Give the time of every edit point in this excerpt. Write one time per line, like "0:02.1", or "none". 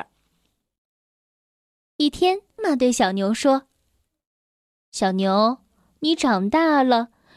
0:02.6